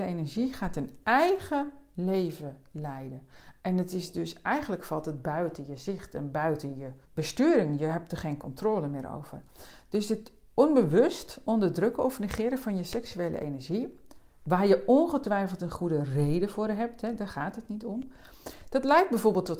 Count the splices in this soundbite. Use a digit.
1